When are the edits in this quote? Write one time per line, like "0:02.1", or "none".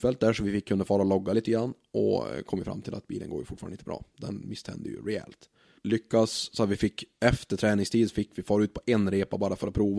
0:05.8